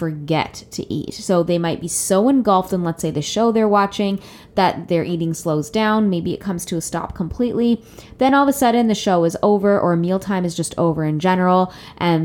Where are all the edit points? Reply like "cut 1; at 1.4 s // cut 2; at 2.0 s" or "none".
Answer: none